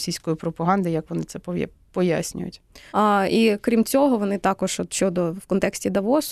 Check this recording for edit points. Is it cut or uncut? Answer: cut